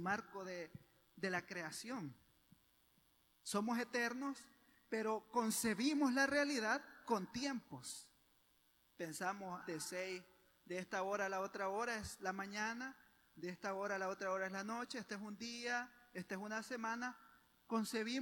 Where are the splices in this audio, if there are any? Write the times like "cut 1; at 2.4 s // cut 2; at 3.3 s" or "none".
cut 1; at 9.6 s